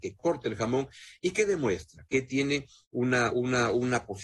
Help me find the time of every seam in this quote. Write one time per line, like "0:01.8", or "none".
none